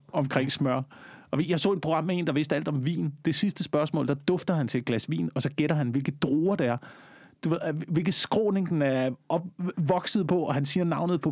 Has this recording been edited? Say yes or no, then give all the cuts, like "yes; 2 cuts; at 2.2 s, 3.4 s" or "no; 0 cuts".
no; 0 cuts